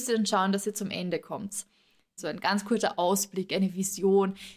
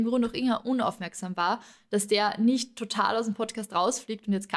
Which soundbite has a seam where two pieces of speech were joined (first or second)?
first